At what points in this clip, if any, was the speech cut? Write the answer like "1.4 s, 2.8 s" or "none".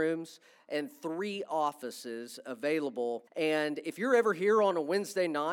3.3 s